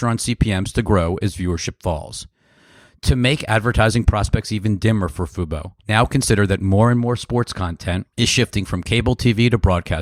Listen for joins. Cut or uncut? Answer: cut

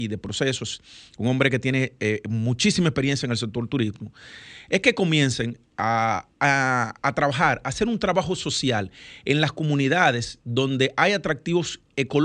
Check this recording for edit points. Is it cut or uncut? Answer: uncut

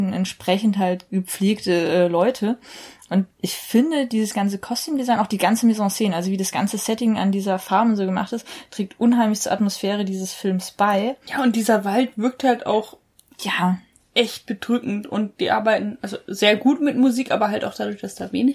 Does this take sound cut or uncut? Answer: cut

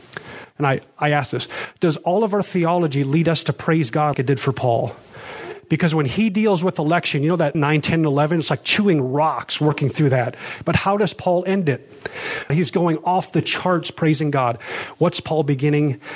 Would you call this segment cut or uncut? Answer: cut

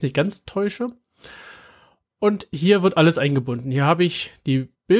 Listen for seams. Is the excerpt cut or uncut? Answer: uncut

